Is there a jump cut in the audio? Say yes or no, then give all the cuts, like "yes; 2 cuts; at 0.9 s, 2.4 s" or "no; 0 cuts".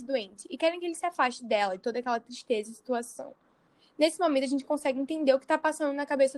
no; 0 cuts